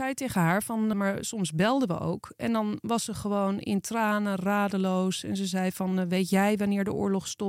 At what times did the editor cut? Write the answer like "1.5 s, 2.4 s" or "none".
0.9 s